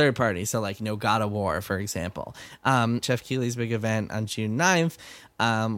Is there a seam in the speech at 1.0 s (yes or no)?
no